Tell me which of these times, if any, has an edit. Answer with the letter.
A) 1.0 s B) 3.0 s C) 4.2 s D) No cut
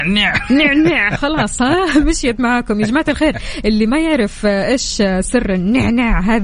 D